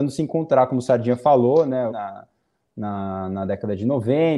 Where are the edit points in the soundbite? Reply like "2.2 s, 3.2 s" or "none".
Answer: 1.9 s